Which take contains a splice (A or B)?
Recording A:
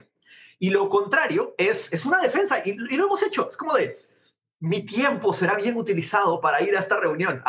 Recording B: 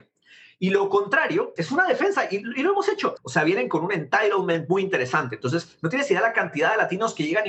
B